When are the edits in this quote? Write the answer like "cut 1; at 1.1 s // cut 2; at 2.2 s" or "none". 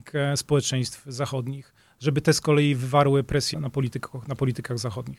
cut 1; at 3.5 s

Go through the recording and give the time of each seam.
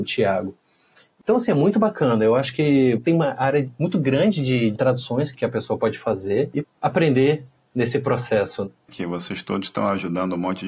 cut 1; at 6.6 s // cut 2; at 8.9 s

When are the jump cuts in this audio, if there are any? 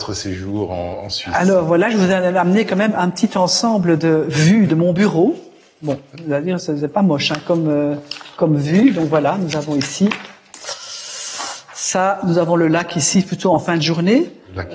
none

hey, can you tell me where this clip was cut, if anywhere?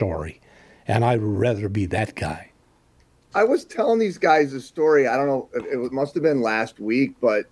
cut 1; at 3.3 s

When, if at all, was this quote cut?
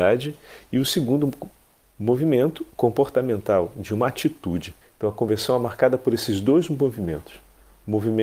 cut 1; at 4.8 s

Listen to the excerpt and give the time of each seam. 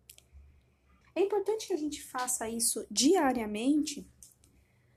cut 1; at 1.0 s

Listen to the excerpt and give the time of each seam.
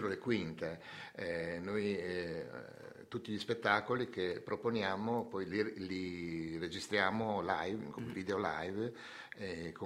none

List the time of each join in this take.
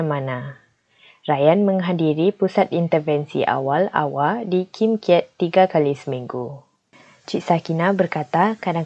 none

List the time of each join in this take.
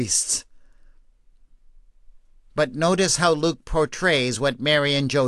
none

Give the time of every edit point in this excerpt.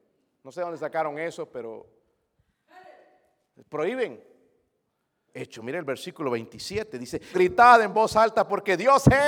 cut 1; at 5.3 s // cut 2; at 7.3 s

